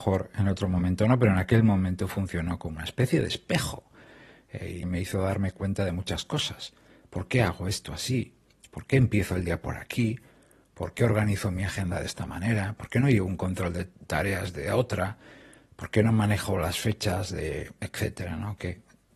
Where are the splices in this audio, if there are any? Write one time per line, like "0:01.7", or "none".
0:04.8